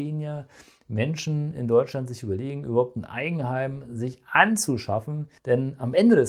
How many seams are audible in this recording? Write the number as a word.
one